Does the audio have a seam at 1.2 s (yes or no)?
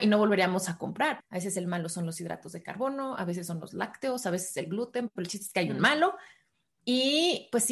yes